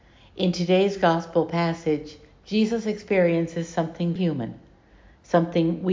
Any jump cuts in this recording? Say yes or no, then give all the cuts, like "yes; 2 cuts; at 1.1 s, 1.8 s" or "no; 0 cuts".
yes; 1 cut; at 4.2 s